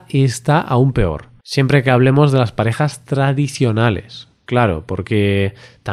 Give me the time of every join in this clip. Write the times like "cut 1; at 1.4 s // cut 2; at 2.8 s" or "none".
cut 1; at 1.4 s